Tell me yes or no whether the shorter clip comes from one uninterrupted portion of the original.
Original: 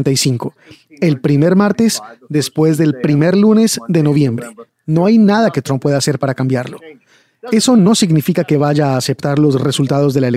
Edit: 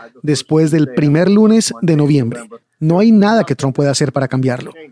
yes